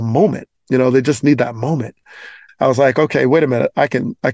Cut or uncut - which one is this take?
cut